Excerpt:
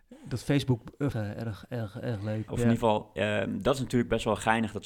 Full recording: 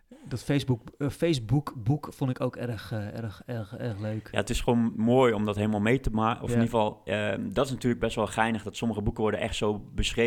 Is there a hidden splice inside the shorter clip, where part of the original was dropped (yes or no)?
yes